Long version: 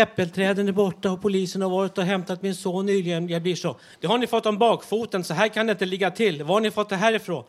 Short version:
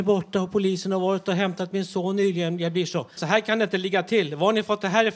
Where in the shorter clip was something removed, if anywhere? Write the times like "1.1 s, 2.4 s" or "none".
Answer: 3.2 s